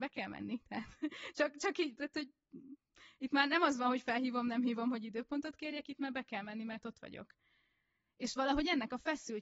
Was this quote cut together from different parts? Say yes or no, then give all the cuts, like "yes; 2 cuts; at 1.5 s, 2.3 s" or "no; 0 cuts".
no; 0 cuts